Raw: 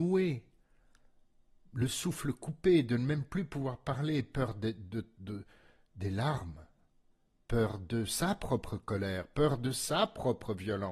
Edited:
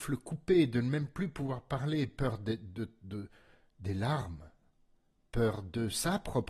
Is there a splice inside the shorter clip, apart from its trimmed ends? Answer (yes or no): no